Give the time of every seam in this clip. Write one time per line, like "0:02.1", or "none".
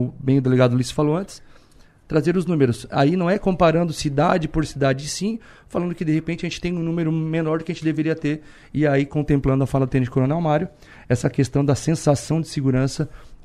none